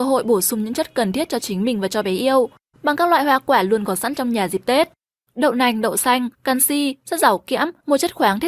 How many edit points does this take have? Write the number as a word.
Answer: two